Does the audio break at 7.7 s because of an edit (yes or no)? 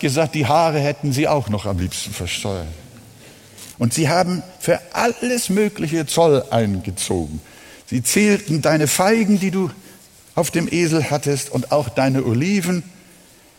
no